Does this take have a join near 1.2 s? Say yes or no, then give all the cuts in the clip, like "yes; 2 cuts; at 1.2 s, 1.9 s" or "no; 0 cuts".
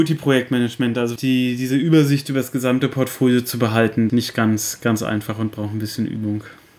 yes; 2 cuts; at 1.2 s, 4.1 s